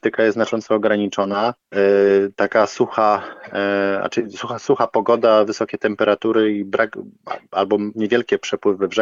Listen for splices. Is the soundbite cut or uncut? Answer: cut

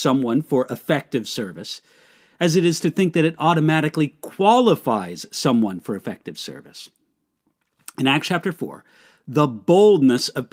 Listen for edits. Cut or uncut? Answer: uncut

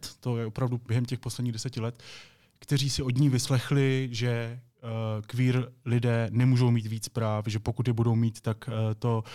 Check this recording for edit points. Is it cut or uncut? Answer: uncut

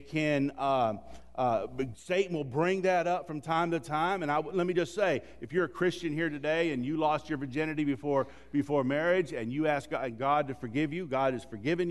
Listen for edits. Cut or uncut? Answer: uncut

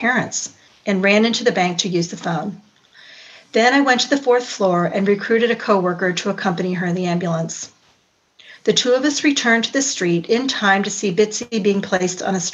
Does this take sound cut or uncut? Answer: uncut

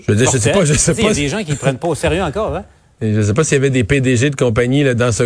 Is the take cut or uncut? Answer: uncut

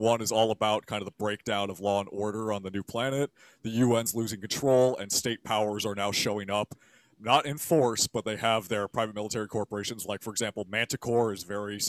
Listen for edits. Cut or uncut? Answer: uncut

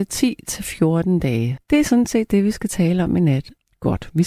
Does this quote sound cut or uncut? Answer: cut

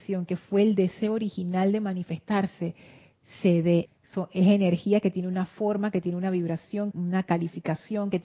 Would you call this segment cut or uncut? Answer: cut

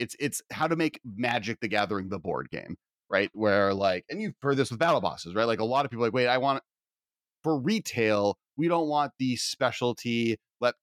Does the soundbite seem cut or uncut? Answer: uncut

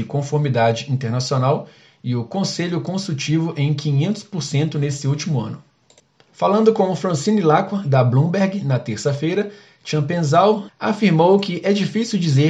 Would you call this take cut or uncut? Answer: cut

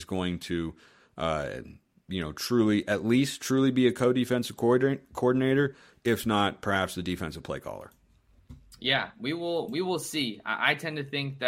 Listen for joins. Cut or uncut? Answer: uncut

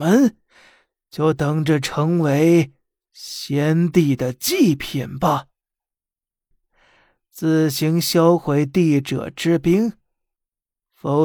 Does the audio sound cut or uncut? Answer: cut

